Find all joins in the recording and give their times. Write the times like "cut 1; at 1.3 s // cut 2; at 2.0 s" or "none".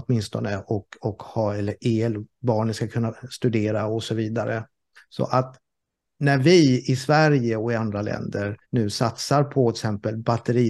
cut 1; at 5.0 s // cut 2; at 8.6 s